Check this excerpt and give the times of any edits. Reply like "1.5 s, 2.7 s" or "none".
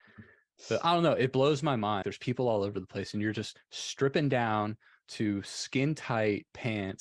2.0 s